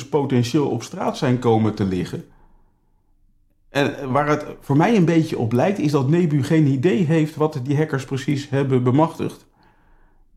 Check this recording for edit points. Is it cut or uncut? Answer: uncut